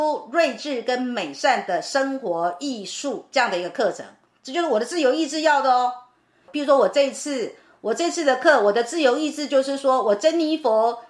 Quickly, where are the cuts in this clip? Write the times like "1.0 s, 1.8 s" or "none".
6.4 s